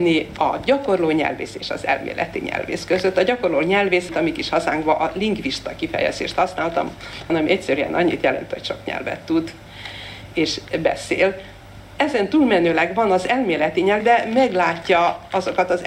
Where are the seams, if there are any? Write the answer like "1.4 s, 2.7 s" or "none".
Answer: 4.1 s, 7.3 s, 14.0 s